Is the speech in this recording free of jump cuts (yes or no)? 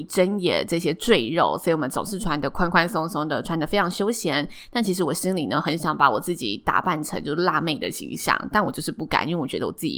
yes